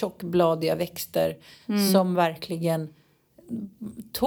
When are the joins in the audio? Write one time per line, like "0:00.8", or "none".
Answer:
none